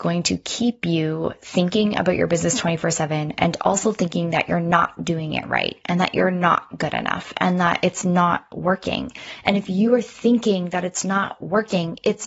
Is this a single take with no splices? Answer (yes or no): yes